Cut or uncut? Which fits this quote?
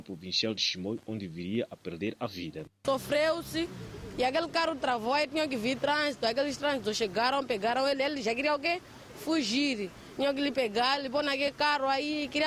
uncut